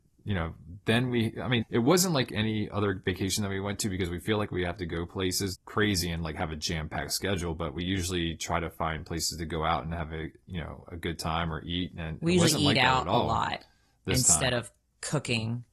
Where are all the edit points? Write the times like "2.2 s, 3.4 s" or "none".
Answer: 1.6 s, 5.5 s

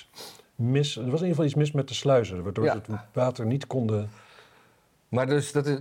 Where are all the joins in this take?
none

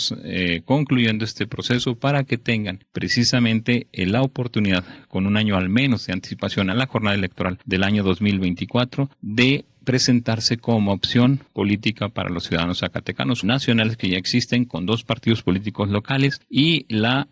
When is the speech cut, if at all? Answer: 13.4 s

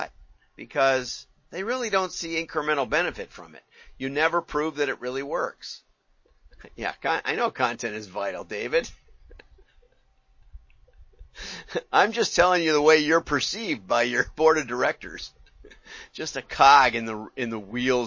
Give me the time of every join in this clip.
none

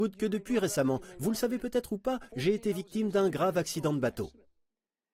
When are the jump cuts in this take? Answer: 2.3 s

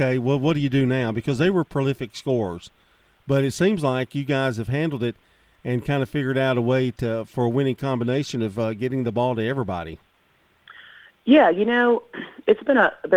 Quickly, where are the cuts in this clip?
none

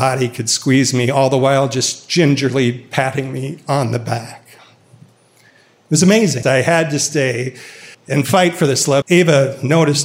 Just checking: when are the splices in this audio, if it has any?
6.4 s, 7.9 s, 9.0 s

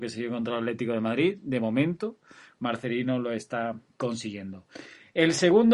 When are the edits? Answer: none

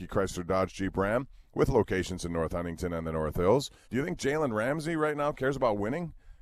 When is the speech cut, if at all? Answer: 3.8 s

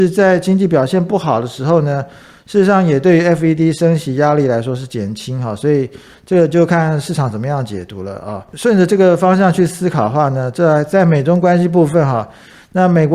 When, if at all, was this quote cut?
none

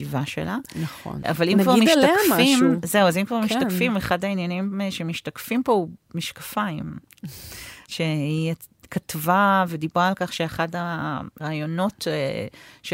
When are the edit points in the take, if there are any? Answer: none

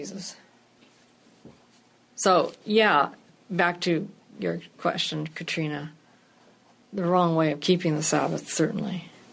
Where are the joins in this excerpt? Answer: none

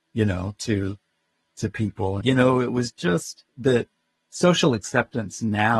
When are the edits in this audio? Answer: 2.2 s, 3.5 s

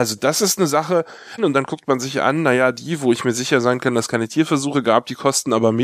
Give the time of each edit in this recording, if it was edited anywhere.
1.4 s

